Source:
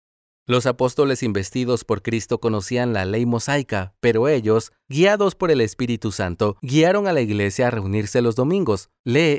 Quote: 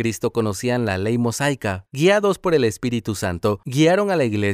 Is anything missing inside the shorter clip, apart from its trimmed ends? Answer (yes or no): yes